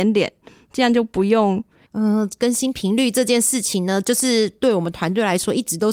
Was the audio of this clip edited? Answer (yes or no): yes